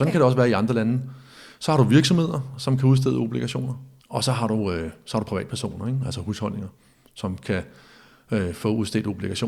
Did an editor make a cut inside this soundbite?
yes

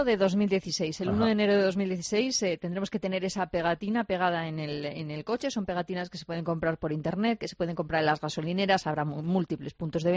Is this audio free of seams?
yes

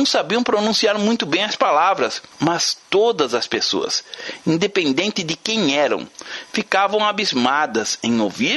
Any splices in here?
yes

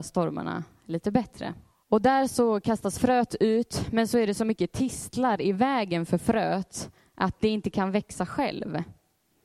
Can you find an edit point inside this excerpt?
yes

